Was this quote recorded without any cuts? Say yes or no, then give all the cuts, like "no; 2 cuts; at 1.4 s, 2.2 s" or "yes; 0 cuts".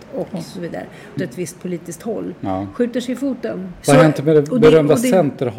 no; 2 cuts; at 1.2 s, 3.8 s